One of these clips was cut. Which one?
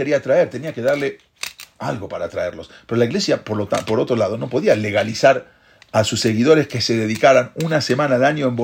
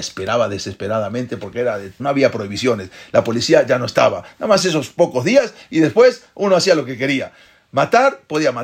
second; 1 cut; at 2.0 s

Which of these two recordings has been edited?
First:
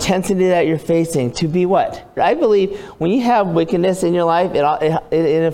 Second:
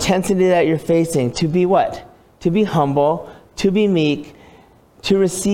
first; 1 cut; at 2.2 s

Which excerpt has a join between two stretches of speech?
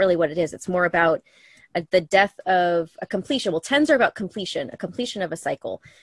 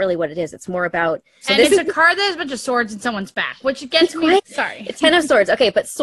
second; 2 cuts; at 1.4 s, 4.4 s

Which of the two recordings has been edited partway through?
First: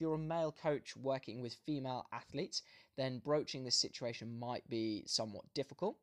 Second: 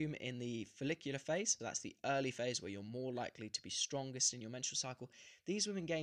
second; 1 cut; at 1.6 s

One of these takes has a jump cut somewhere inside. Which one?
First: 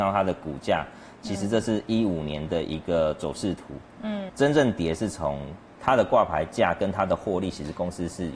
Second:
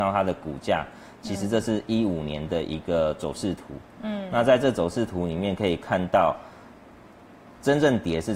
first; 2 cuts; at 4.3 s, 5.8 s

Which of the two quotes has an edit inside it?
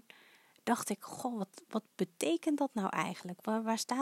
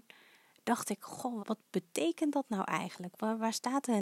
second; 1 cut; at 1.4 s

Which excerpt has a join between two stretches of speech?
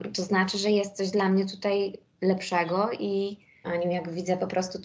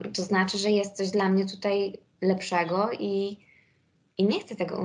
first; 1 cut; at 3.6 s

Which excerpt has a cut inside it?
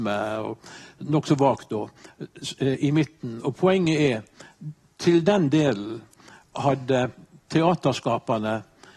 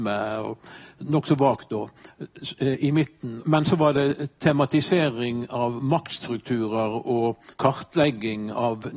second; 2 cuts; at 3.4 s, 7.5 s

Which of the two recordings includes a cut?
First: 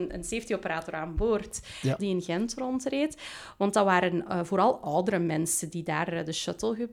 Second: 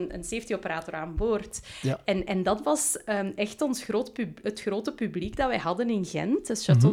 first; 1 cut; at 2.0 s

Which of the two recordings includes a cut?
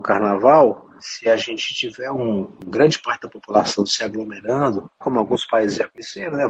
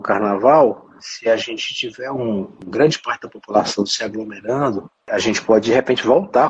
first; 1 cut; at 5.0 s

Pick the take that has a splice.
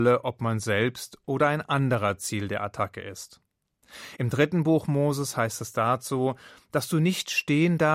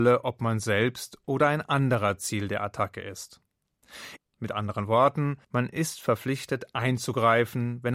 second; 2 cuts; at 4.2 s, 5.4 s

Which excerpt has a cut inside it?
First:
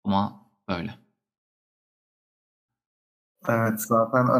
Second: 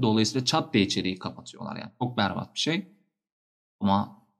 first; 1 cut; at 2.7 s

